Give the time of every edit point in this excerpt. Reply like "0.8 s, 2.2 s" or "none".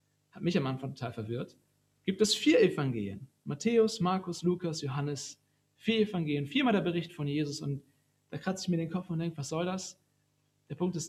none